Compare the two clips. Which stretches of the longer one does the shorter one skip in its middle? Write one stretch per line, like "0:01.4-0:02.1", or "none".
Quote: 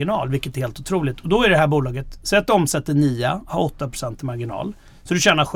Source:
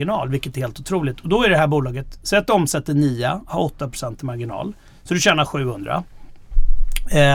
none